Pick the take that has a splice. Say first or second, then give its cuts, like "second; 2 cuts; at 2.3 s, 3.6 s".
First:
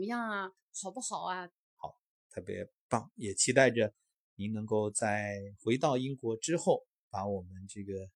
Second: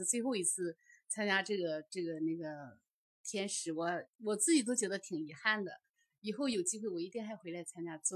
first; 1 cut; at 1.7 s